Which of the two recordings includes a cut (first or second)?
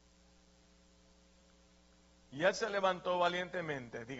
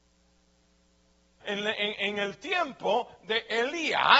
second